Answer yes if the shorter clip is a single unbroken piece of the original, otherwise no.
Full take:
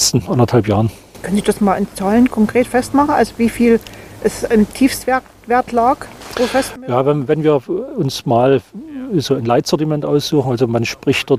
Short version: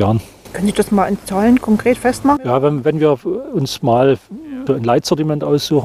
no